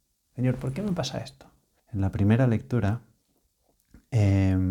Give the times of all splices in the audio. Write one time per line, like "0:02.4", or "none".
0:01.8